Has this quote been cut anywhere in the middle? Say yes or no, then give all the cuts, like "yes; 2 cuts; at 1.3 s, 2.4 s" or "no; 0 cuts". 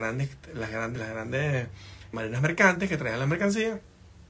yes; 2 cuts; at 1.0 s, 2.1 s